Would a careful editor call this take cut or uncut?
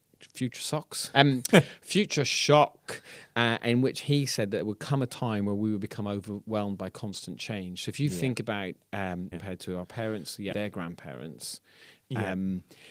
cut